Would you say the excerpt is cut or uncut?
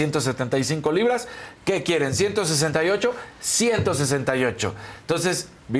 uncut